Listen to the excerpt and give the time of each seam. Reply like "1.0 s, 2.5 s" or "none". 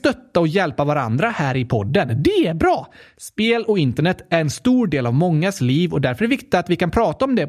none